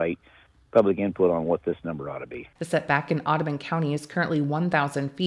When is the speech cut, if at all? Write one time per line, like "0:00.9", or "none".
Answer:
0:02.6